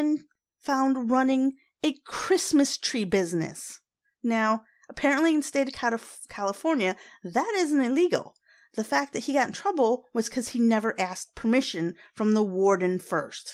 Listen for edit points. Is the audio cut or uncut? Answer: uncut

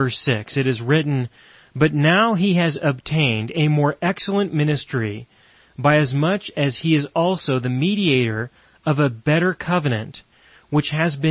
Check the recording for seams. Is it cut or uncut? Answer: uncut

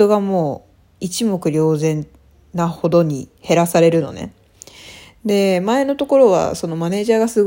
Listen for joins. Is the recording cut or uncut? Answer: uncut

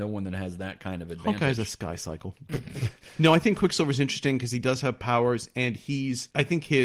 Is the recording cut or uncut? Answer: uncut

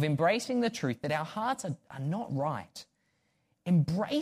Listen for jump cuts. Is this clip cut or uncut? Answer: uncut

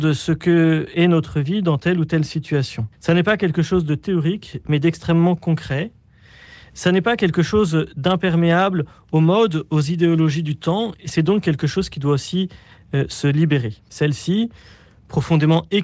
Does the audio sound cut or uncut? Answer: cut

